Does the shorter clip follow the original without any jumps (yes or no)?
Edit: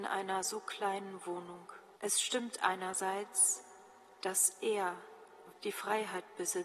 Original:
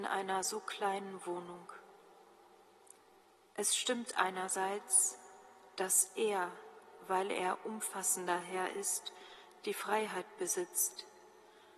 no